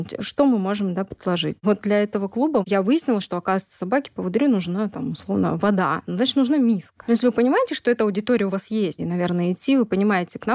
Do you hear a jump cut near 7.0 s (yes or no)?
yes